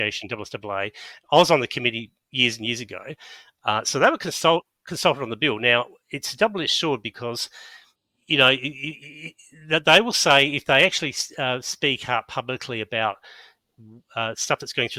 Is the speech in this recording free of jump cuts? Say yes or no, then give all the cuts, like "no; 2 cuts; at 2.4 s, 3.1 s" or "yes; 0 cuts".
yes; 0 cuts